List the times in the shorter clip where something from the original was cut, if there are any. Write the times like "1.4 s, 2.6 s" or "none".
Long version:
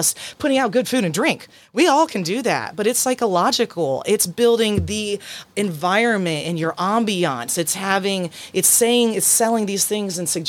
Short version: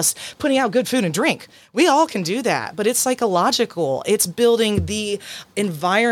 none